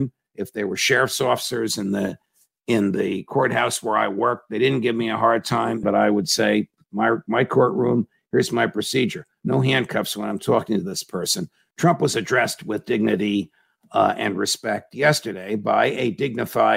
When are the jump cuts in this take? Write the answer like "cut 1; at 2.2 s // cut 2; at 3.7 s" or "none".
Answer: cut 1; at 5.8 s // cut 2; at 11.7 s